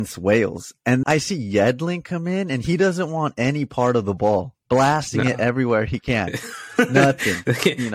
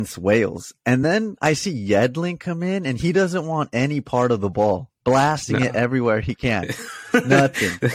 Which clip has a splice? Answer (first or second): first